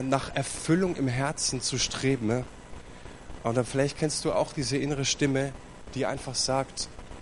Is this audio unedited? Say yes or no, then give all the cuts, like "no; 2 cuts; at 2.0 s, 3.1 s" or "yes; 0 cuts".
yes; 0 cuts